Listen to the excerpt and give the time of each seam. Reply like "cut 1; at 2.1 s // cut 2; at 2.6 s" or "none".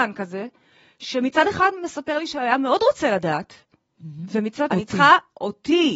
cut 1; at 4.7 s

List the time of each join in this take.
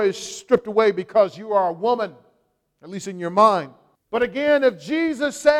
cut 1; at 3.9 s

